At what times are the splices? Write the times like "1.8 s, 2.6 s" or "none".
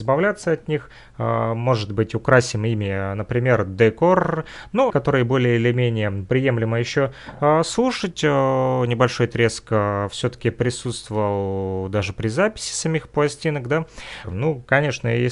4.9 s, 14.2 s